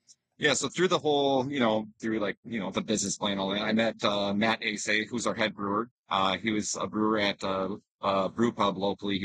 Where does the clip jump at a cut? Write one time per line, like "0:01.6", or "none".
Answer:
0:02.0